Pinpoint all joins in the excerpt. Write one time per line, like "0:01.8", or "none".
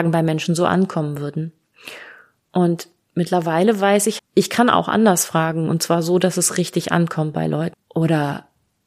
0:04.2
0:07.7